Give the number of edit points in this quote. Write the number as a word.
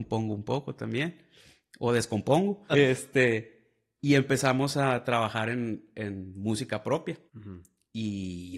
two